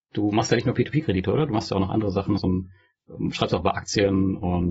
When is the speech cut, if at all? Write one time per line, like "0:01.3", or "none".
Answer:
0:02.4